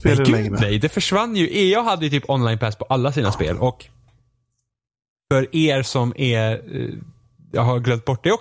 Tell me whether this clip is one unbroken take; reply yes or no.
yes